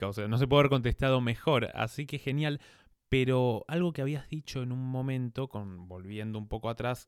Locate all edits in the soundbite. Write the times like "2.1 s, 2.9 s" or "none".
none

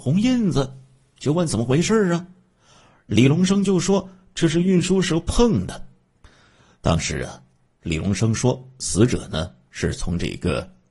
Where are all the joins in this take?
none

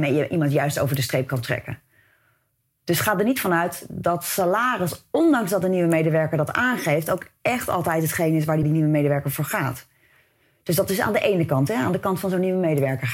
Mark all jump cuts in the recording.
8.6 s

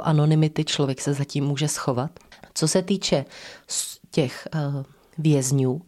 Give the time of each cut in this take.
2.4 s

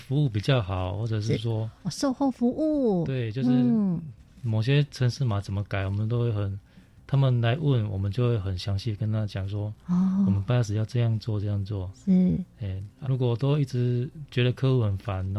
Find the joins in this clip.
13.0 s

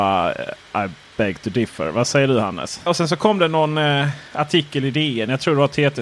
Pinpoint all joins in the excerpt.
2.9 s

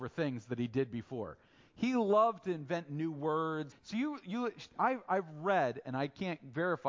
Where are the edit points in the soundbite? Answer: 3.7 s

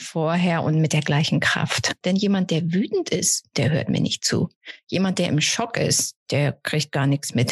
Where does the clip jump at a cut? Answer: 2.0 s

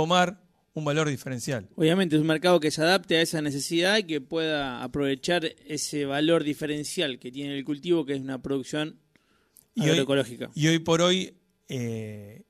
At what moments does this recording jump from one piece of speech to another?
1.7 s

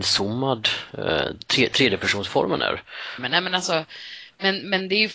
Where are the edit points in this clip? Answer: 3.2 s

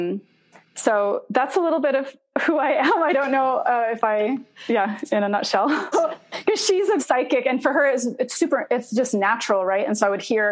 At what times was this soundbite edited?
5.9 s, 7.0 s

